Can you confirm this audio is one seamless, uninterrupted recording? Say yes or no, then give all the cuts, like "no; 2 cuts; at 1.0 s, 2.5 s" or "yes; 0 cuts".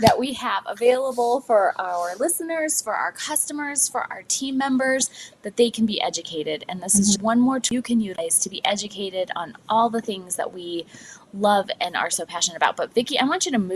no; 1 cut; at 7.2 s